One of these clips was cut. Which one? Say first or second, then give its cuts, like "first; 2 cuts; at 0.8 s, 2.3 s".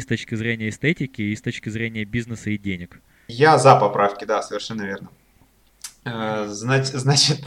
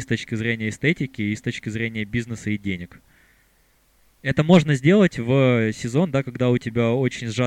first; 1 cut; at 3.3 s